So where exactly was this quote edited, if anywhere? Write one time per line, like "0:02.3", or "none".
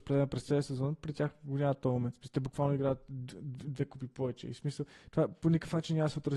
none